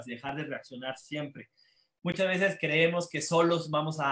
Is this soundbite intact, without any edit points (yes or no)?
no